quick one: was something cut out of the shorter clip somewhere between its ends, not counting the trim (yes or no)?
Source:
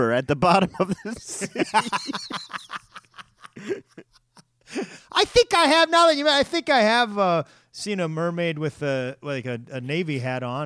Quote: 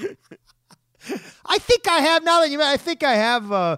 no